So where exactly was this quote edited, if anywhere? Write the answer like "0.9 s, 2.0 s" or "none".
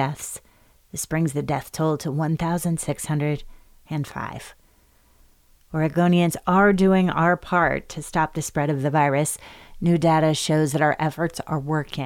none